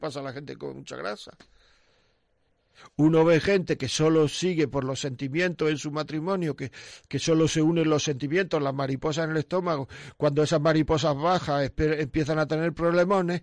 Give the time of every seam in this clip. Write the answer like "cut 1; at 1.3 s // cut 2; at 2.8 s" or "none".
none

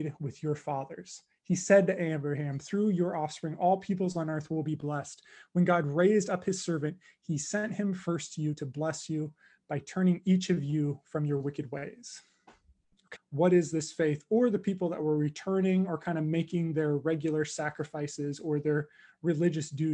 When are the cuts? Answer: cut 1; at 13.1 s

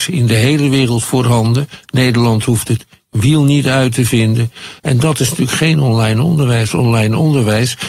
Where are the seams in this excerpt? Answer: cut 1; at 4.8 s

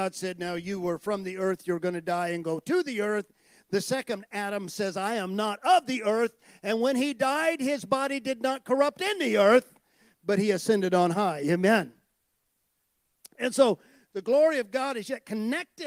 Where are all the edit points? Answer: none

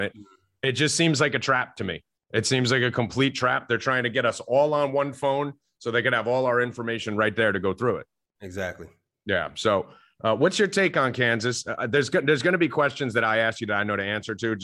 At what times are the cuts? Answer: none

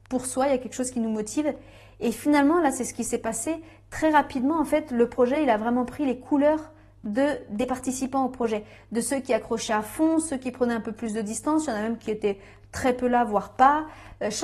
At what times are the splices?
none

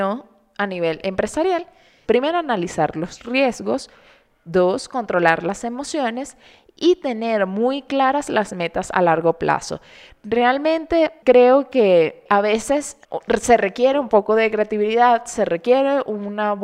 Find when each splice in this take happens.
cut 1; at 2.0 s

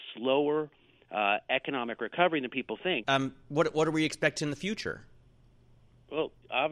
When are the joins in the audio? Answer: cut 1; at 3.0 s

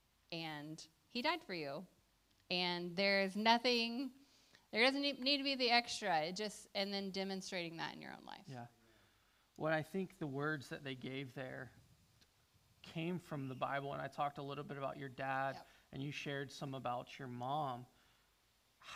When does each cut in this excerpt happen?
none

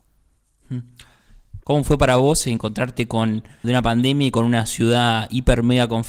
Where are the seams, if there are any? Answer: cut 1; at 1.6 s // cut 2; at 3.6 s

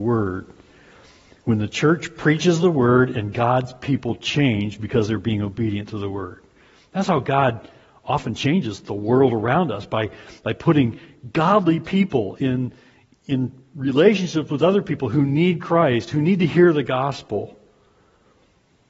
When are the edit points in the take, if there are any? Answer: none

